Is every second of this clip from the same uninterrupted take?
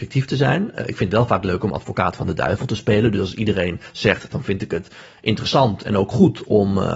no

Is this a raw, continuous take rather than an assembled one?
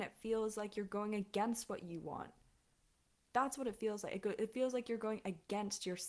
yes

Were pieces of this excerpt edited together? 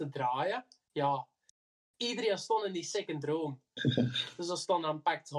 no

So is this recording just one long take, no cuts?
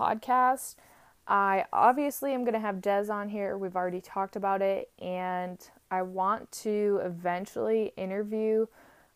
yes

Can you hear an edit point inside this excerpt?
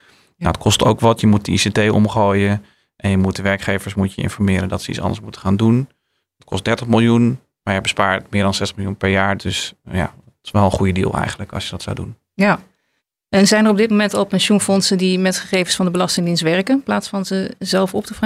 yes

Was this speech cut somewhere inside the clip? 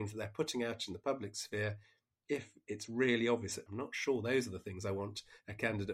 yes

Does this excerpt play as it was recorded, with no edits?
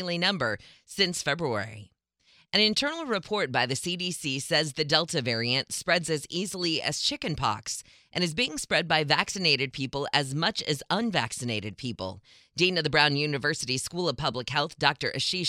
yes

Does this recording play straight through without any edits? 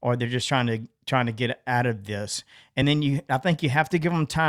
yes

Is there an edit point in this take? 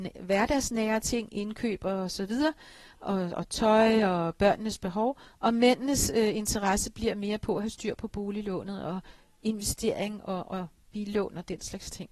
no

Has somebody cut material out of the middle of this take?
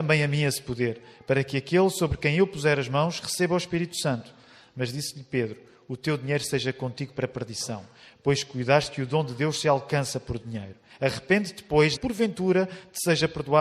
yes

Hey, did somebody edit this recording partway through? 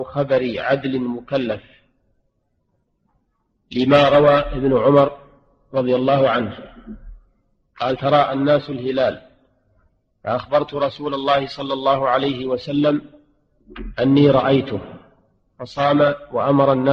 no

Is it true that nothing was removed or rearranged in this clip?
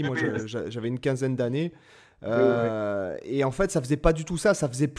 yes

